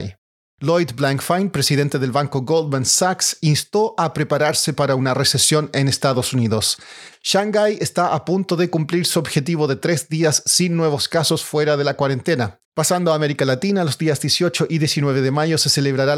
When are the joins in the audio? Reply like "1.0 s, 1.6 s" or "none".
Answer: 7.1 s, 12.6 s